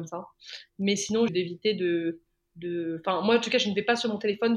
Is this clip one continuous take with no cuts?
no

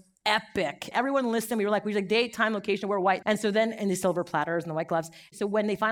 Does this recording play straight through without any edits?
no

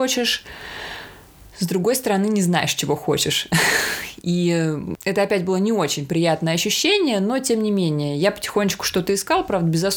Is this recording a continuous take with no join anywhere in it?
yes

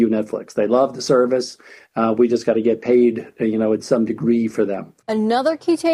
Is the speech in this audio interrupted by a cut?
yes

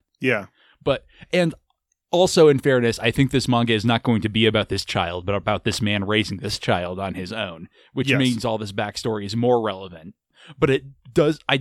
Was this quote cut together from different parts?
no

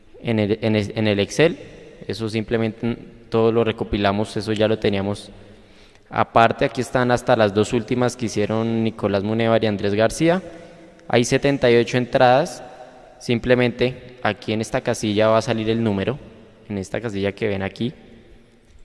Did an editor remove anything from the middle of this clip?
no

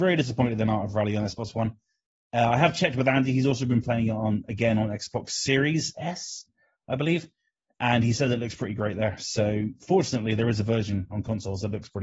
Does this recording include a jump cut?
no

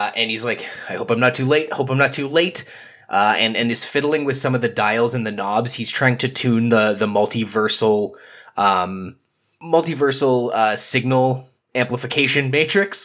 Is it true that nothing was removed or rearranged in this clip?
yes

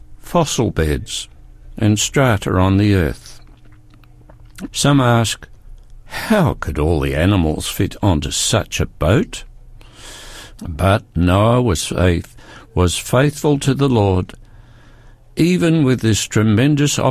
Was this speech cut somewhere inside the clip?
yes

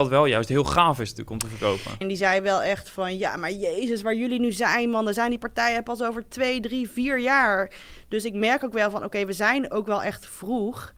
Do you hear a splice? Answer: yes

